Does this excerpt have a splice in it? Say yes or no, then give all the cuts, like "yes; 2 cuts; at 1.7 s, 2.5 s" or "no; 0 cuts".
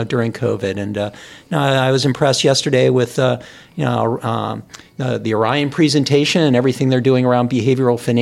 no; 0 cuts